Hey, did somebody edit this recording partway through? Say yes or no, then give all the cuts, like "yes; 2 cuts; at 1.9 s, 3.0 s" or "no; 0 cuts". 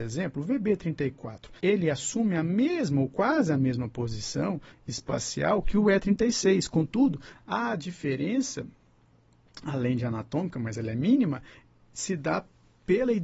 yes; 1 cut; at 1.6 s